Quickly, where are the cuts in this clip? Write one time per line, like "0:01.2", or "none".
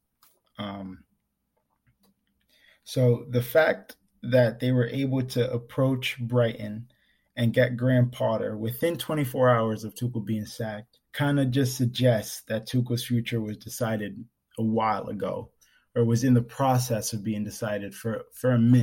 0:11.0